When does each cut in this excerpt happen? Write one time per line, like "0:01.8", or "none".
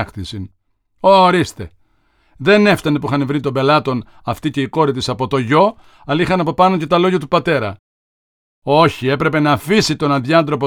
none